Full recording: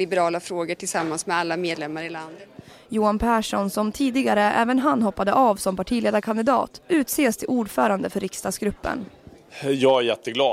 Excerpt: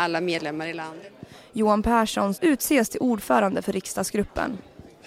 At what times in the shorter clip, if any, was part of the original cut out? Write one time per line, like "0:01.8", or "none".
0:02.3